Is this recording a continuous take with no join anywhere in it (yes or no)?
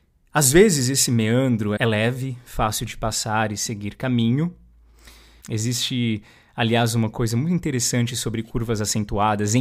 no